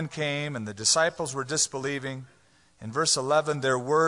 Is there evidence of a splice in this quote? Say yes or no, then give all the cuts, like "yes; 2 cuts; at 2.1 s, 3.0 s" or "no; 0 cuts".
no; 0 cuts